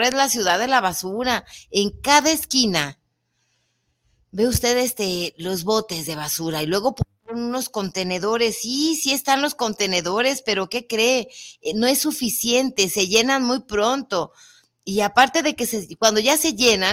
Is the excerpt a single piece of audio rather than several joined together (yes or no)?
yes